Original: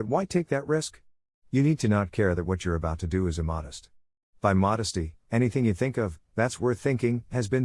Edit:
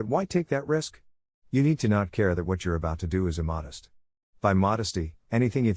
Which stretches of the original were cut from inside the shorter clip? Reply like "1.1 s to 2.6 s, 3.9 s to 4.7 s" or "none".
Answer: none